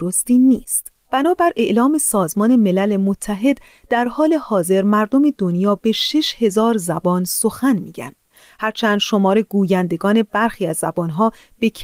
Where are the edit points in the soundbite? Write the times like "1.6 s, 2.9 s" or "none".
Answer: 1.0 s